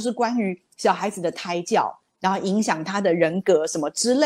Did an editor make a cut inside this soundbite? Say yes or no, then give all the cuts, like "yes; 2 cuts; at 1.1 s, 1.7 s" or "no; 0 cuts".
no; 0 cuts